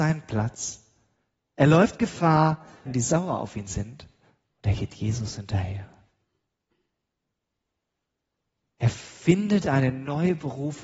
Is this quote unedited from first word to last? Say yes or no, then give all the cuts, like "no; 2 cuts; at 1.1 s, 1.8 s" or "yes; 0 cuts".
no; 1 cut; at 2.9 s